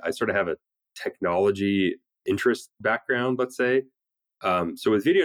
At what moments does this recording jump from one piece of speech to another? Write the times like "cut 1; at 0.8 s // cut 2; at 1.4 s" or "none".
none